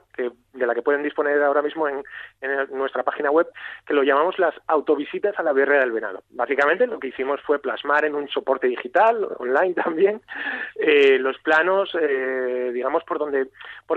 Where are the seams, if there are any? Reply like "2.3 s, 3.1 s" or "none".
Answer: none